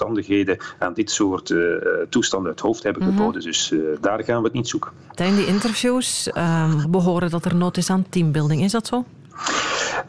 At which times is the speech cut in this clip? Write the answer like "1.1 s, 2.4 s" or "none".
5.2 s, 6.8 s